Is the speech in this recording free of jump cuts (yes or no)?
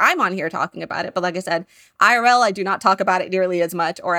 yes